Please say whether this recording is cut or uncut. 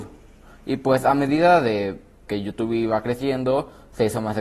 cut